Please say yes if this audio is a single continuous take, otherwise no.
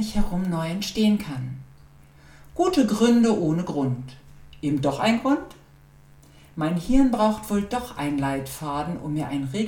yes